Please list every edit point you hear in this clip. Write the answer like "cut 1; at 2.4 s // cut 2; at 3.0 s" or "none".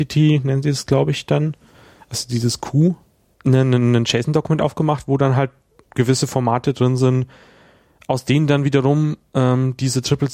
cut 1; at 3.3 s